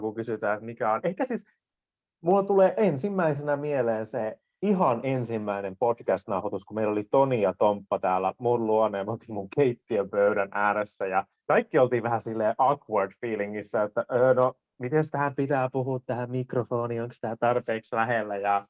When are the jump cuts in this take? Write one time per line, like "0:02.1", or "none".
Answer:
none